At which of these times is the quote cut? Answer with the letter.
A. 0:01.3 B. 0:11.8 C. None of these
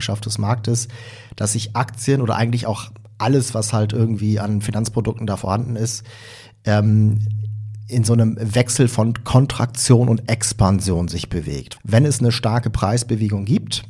B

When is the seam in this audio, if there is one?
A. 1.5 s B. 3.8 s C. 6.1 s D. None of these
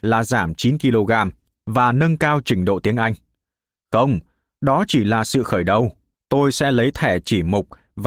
C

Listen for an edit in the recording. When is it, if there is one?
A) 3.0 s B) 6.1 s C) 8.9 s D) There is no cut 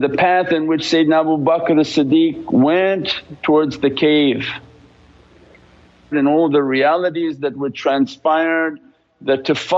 B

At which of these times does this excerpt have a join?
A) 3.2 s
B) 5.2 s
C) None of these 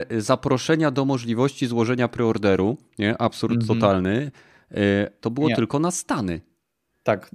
B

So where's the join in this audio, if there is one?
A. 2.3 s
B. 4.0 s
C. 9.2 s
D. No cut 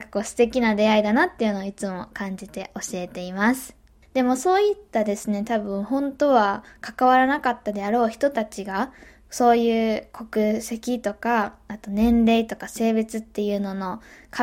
B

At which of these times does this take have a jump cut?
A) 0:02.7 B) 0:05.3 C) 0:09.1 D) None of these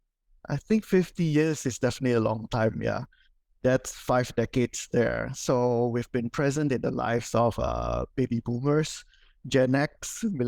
D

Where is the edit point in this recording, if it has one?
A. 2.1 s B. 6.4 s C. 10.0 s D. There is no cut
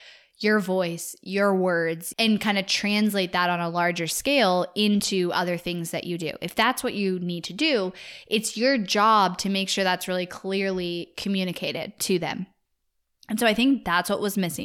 A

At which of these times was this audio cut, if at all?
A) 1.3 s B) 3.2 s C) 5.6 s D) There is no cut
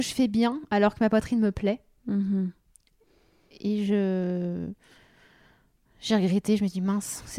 D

